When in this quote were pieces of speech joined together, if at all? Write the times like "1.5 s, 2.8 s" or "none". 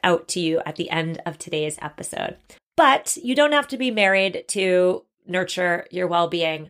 2.6 s

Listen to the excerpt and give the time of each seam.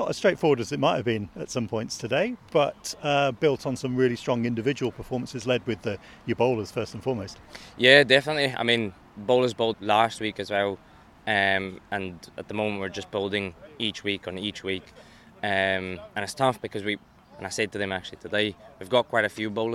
9.7 s

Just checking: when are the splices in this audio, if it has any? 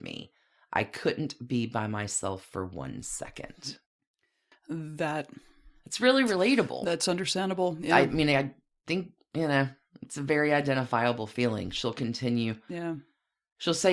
none

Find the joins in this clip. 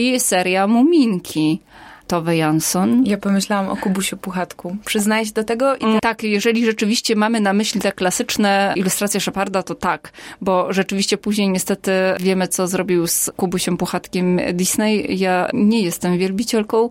6.0 s

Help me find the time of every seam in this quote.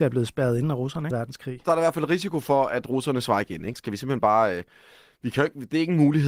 1.1 s, 3.8 s

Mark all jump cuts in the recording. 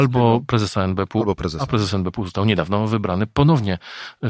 none

